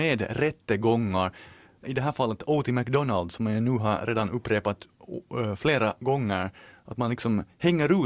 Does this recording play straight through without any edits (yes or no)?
no